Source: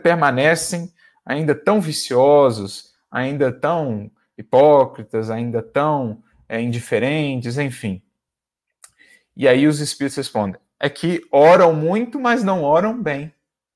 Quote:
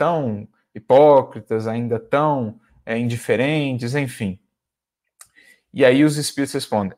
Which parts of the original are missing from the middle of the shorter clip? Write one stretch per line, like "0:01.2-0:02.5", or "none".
none